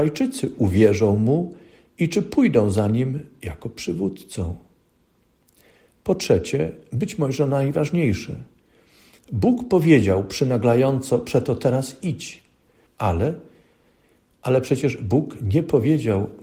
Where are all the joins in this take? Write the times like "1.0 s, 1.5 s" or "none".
12.9 s